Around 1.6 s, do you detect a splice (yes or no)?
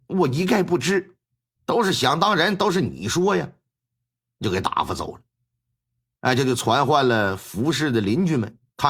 yes